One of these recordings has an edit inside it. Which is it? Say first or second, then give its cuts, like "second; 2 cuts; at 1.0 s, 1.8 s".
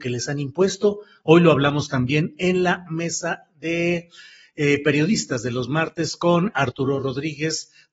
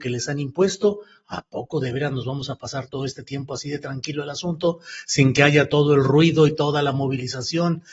first; 1 cut; at 1.2 s